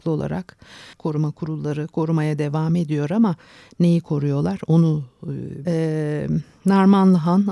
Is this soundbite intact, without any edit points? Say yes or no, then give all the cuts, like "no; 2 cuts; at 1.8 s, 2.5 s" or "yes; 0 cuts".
no; 2 cuts; at 0.9 s, 5.7 s